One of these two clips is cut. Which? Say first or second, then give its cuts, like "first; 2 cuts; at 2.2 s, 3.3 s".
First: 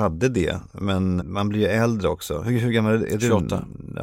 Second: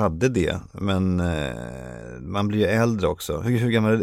first; 1 cut; at 1.2 s